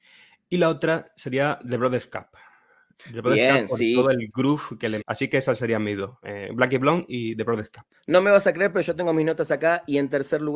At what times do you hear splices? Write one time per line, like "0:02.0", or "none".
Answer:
0:05.0